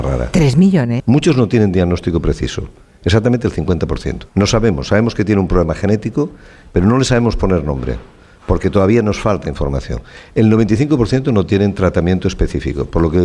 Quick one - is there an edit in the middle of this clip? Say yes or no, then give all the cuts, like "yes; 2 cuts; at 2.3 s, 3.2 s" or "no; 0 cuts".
yes; 2 cuts; at 1.0 s, 4.3 s